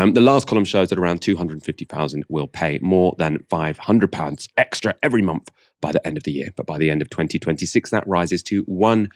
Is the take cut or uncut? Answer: uncut